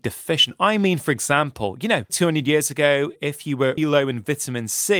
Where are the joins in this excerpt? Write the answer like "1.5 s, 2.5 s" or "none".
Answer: 2.1 s, 3.8 s